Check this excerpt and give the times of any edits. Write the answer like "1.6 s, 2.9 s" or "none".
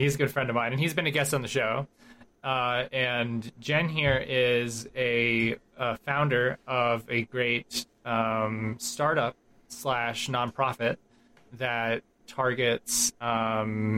none